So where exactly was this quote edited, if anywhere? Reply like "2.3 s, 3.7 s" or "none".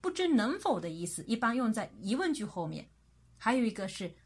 none